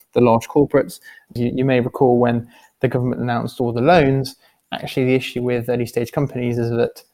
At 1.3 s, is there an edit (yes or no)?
yes